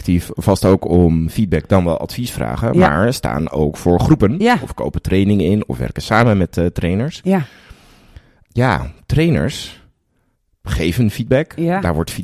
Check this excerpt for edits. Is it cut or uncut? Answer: uncut